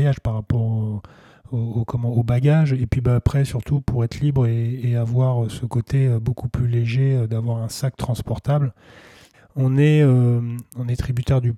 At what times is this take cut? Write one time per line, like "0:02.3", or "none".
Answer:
0:09.3
0:10.6